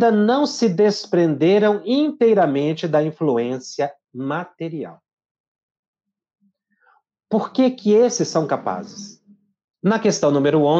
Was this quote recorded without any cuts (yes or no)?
no